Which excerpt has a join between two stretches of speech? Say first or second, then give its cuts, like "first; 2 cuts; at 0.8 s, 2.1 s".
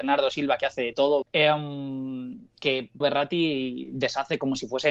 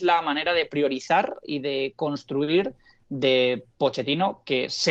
first; 2 cuts; at 1.2 s, 3.0 s